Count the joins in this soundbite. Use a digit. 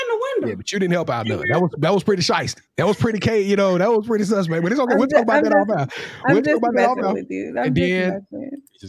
0